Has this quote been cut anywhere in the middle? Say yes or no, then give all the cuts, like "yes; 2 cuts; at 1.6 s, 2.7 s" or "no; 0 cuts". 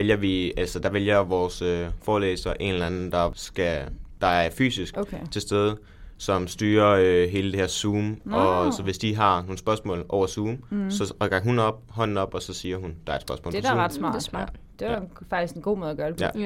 no; 0 cuts